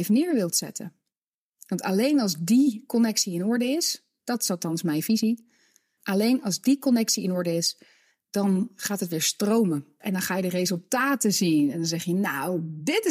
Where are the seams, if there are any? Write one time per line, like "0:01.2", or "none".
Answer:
0:06.0
0:10.0